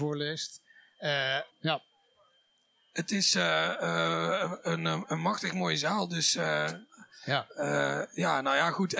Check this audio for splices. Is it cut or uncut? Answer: cut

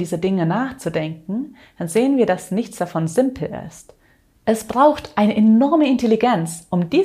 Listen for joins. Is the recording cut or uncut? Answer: uncut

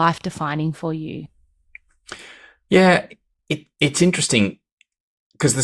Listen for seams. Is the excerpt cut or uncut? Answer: uncut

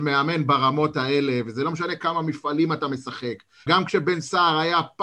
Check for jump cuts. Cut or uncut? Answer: cut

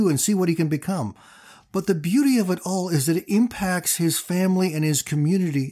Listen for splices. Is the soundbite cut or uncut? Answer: uncut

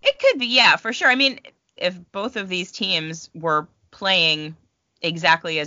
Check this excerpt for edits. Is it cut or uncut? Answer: cut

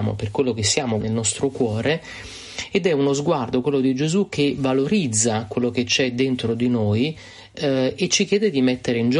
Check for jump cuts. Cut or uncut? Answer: cut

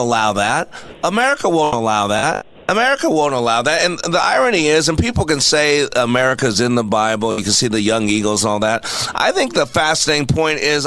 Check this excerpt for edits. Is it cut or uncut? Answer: uncut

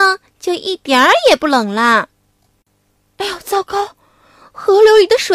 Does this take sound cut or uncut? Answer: uncut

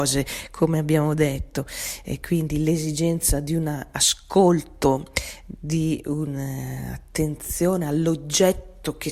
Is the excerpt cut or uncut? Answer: uncut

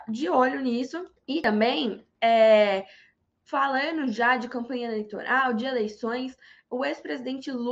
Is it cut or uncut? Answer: cut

